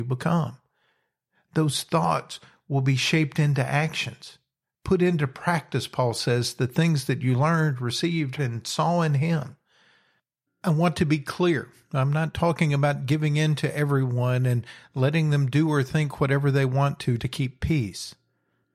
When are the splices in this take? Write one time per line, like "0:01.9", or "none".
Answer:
0:08.4
0:10.5
0:17.2